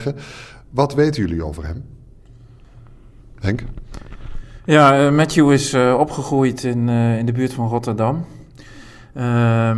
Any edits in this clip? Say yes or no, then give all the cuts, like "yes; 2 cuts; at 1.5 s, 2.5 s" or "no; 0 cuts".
no; 0 cuts